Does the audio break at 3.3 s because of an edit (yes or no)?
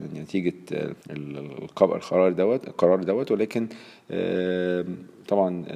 no